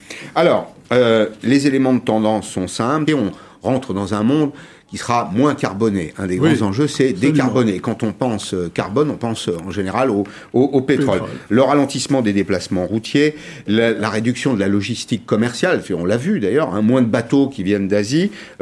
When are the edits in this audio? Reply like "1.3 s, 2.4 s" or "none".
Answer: 3.1 s